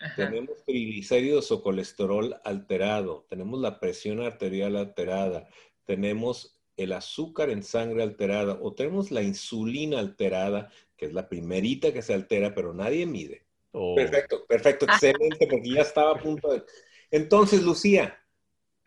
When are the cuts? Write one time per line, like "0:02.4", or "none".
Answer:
0:13.7